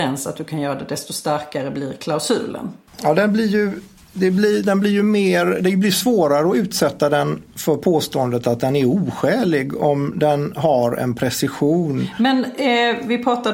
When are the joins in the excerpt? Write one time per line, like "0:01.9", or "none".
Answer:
0:02.9